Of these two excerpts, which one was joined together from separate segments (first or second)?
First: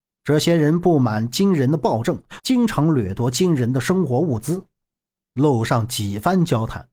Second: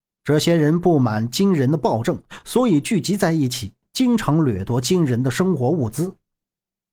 first